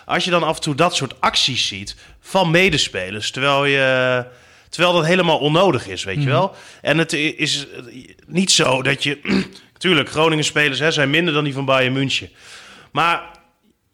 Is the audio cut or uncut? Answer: uncut